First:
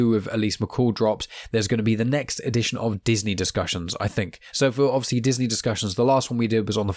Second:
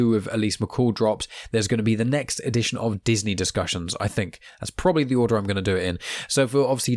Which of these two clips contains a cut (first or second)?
first